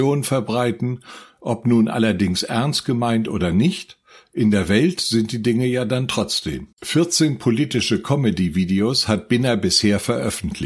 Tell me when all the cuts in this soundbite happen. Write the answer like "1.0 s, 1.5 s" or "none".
6.7 s